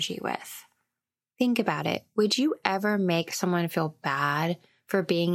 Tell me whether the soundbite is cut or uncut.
uncut